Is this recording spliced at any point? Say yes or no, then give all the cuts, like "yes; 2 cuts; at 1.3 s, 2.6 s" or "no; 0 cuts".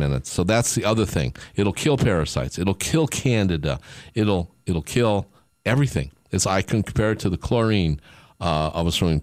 no; 0 cuts